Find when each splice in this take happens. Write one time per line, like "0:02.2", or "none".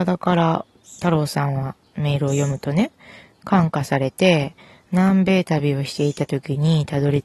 none